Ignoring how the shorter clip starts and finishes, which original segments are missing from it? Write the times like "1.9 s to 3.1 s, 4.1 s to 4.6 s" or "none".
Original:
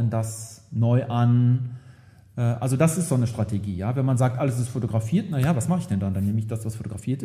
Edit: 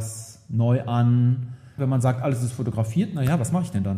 2.0 s to 3.9 s